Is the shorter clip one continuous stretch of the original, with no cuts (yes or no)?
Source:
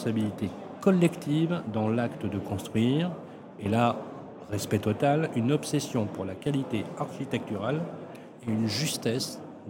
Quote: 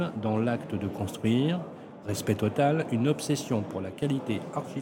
no